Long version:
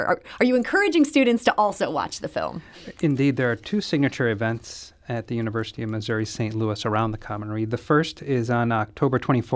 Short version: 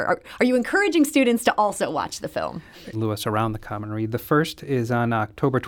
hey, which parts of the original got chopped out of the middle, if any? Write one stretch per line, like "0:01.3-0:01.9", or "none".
0:02.9-0:06.5